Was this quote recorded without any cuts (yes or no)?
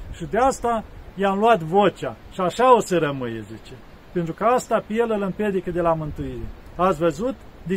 yes